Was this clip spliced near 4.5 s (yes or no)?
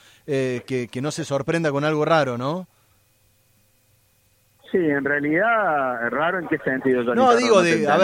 no